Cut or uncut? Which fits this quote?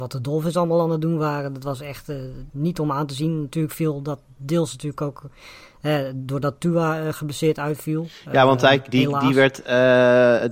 cut